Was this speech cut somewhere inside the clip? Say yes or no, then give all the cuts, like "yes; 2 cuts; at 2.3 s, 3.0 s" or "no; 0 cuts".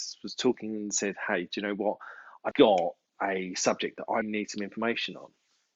yes; 2 cuts; at 2.5 s, 4.2 s